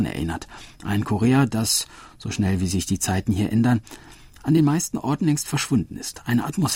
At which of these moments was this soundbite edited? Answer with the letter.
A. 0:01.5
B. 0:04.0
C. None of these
C